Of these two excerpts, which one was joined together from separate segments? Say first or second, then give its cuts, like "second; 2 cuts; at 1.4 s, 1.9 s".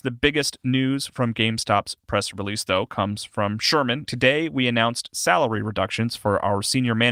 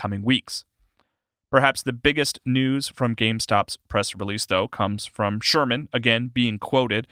first; 1 cut; at 4.1 s